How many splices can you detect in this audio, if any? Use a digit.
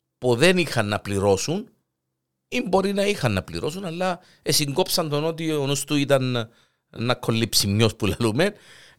0